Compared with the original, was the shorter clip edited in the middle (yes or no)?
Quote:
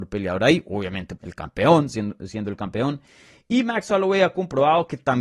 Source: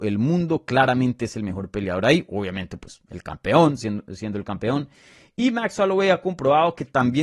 yes